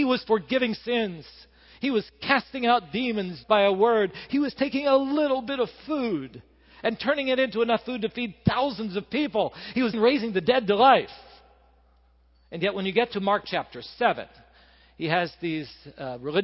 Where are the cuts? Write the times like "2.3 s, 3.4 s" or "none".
3.4 s, 9.9 s